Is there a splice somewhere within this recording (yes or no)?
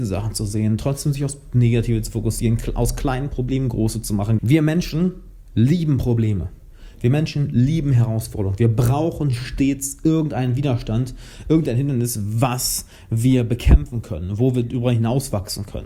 yes